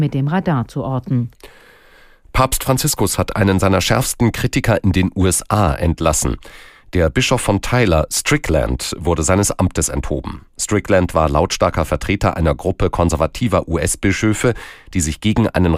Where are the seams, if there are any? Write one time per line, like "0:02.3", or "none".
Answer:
none

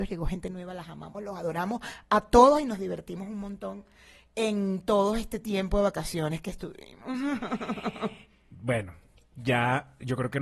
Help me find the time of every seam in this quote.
0:01.1

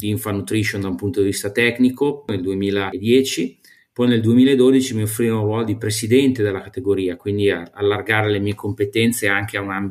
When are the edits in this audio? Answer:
none

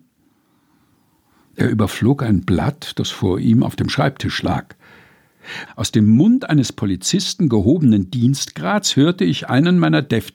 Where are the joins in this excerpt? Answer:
0:05.7

